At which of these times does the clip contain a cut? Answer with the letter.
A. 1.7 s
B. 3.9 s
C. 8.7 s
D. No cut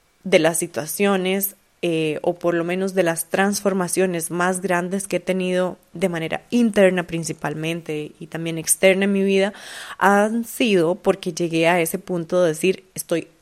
D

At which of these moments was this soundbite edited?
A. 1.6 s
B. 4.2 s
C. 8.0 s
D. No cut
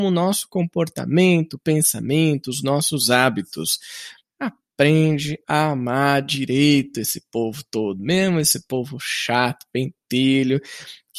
B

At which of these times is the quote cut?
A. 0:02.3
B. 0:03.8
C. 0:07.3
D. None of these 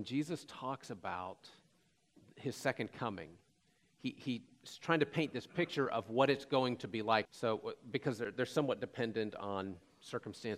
C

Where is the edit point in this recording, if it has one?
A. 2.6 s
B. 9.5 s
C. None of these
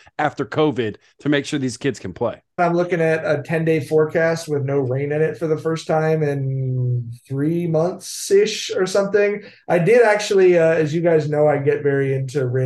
A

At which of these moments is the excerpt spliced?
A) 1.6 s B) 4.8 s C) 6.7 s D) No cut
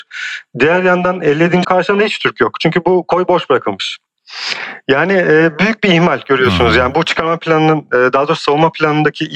A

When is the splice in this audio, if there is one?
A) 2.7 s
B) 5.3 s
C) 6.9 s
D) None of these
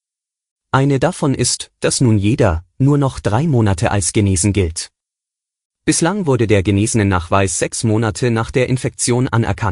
A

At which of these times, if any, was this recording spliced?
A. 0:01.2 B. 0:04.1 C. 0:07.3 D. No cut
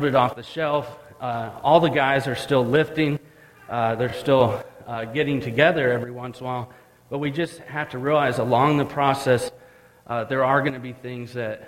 D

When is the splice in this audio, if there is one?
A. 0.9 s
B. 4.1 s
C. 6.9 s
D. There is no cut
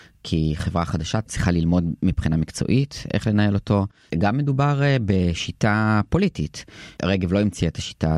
B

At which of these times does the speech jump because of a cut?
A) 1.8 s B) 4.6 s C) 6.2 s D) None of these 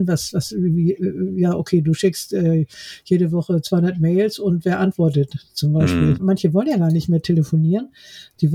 C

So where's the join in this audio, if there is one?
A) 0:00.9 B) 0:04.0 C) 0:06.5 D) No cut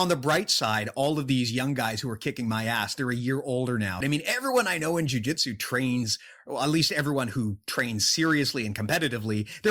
B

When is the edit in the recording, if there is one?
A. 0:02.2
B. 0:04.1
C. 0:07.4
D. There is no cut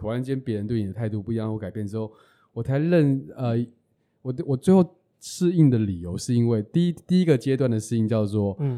D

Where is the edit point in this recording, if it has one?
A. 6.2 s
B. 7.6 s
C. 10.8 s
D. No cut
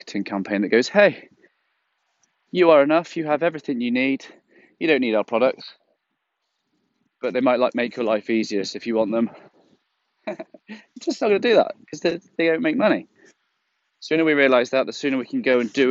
D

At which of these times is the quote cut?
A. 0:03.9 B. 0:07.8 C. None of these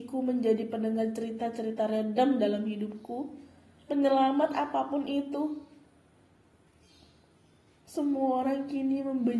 A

